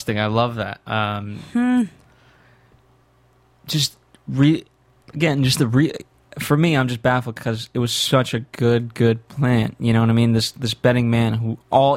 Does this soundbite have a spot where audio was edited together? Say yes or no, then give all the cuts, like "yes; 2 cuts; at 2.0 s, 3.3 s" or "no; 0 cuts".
no; 0 cuts